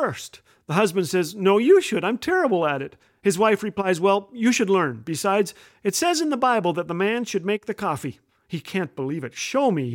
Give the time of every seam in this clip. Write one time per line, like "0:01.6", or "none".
none